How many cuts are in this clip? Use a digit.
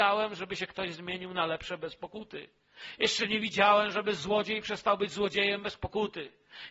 0